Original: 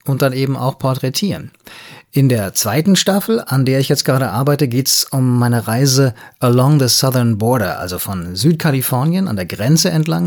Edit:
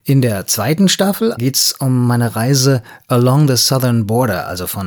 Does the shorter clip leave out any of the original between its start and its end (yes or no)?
yes